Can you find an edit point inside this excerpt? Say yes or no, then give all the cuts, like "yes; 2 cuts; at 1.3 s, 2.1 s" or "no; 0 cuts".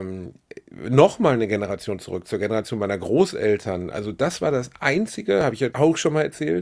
yes; 1 cut; at 5.7 s